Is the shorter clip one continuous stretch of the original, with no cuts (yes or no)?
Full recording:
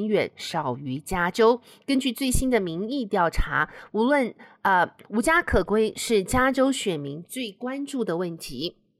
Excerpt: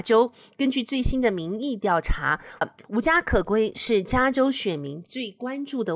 no